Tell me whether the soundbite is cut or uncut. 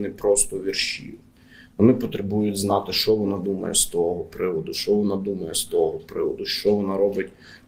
uncut